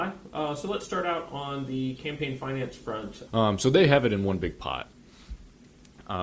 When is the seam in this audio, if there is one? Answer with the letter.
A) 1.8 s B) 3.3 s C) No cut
B